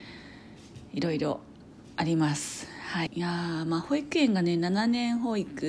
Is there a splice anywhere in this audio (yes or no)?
yes